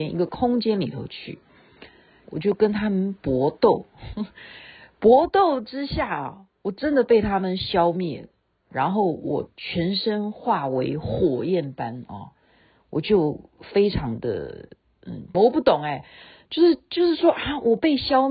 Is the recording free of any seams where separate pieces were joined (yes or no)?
no